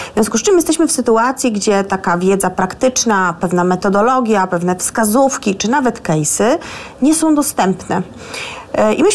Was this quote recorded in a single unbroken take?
yes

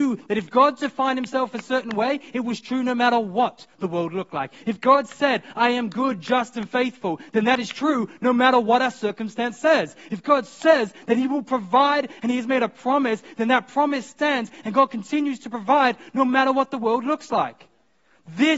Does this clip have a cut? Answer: no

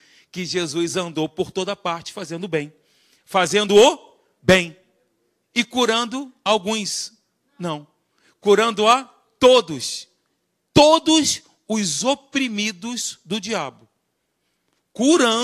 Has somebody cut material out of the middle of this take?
no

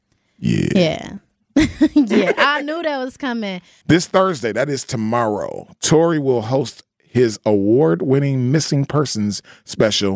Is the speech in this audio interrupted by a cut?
yes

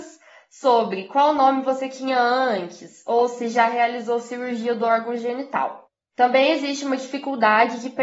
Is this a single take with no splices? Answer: yes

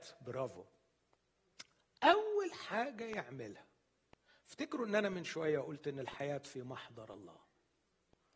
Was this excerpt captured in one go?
yes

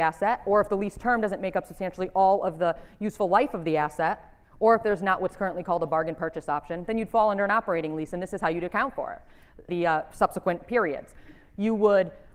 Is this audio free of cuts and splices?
no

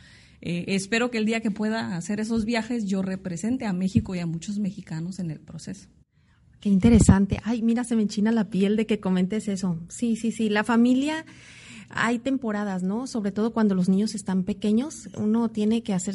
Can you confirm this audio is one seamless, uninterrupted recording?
yes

